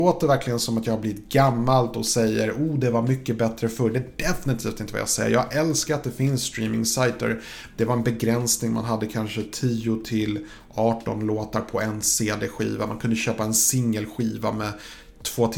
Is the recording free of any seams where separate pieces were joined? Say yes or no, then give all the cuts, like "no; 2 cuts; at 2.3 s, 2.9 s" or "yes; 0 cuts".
no; 1 cut; at 7.7 s